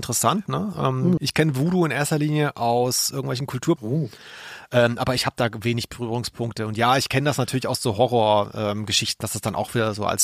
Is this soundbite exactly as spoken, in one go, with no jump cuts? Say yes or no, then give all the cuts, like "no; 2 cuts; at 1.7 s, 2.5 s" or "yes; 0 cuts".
no; 2 cuts; at 1.2 s, 3.8 s